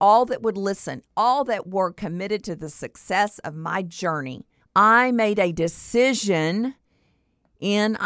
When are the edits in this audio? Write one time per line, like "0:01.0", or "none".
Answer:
0:04.6